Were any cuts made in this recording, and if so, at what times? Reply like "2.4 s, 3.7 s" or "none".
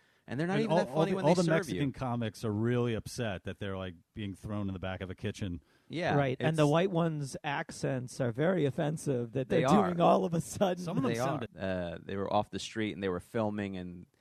11.5 s